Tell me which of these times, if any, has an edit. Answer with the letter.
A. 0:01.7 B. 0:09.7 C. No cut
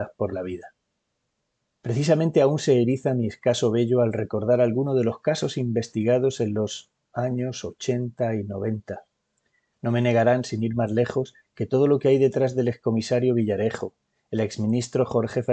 B